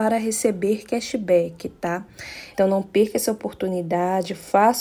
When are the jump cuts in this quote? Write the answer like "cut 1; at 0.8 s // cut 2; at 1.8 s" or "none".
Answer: cut 1; at 2.5 s